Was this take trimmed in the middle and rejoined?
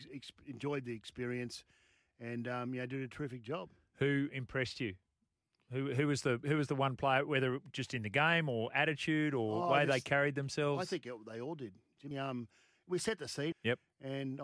yes; 2 cuts; at 12.1 s, 13.5 s

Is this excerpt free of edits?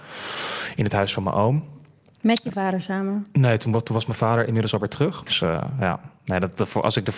no; 1 cut; at 5.3 s

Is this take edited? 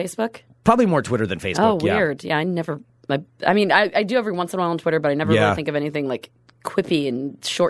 no; 0 cuts

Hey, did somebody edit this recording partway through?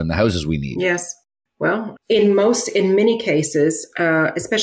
yes; 1 cut; at 2.0 s

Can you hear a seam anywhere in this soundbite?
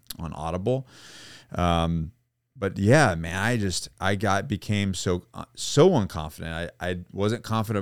no; 0 cuts

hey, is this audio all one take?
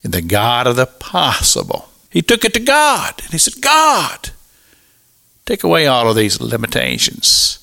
no; 1 cut; at 2.1 s

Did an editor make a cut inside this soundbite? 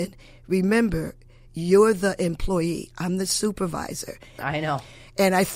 yes; 1 cut; at 4.4 s

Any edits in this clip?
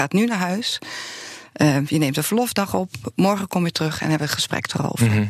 no; 0 cuts

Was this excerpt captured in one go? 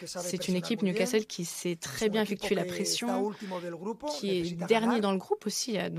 yes; 0 cuts

